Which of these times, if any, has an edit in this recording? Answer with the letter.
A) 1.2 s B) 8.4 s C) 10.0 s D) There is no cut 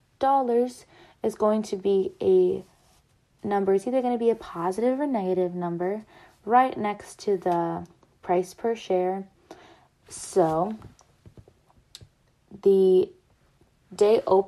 C